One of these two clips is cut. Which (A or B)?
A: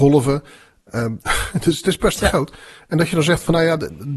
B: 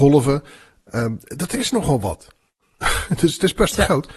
A